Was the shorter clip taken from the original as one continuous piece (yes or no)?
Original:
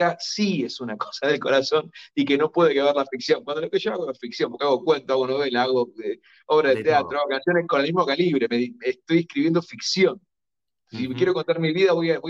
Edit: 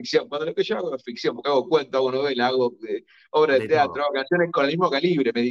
yes